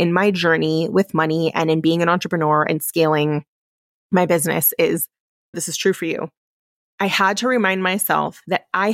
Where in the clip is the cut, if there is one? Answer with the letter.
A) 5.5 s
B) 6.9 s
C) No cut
A